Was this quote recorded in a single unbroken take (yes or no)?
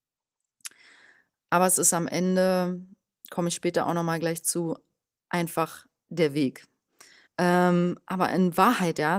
no